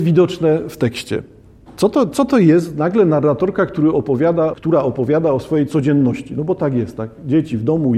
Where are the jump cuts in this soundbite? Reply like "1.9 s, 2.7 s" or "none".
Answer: 4.5 s